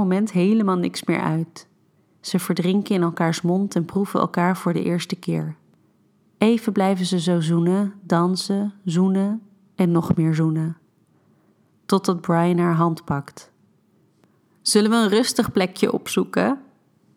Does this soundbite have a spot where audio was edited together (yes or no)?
no